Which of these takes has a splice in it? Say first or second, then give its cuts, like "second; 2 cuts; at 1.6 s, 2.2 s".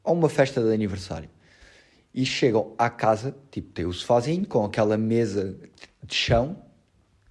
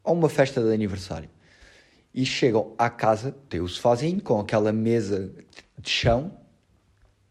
second; 1 cut; at 3.5 s